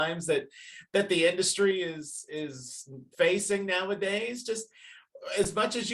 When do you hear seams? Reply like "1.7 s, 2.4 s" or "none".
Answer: 3.1 s